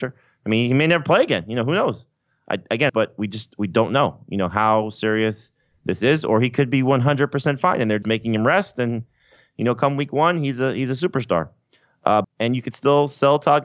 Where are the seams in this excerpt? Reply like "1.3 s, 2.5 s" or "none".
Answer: 2.9 s, 8.0 s, 12.2 s